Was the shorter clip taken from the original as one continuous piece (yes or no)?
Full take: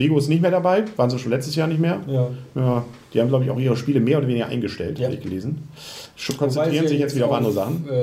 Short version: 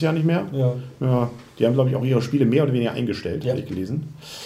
yes